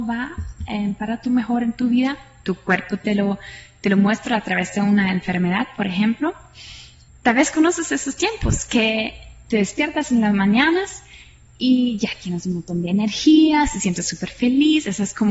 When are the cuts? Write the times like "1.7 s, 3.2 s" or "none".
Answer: 7.1 s